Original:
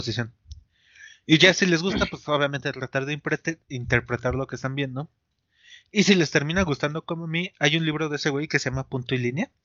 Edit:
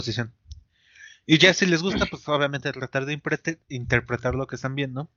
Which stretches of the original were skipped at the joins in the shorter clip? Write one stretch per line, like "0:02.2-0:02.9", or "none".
none